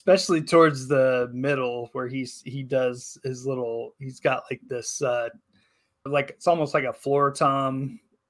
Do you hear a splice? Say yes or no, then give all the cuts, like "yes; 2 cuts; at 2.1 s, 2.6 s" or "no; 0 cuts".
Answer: yes; 1 cut; at 6.1 s